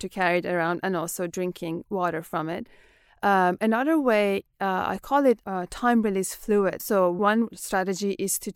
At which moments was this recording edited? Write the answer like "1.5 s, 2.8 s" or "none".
6.8 s